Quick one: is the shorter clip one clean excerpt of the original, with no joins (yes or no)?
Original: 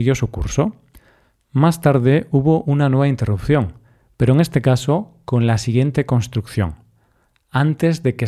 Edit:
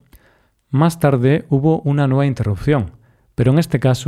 yes